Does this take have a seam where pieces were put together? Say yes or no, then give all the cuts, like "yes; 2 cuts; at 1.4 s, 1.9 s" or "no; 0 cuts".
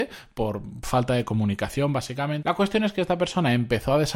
yes; 1 cut; at 2.4 s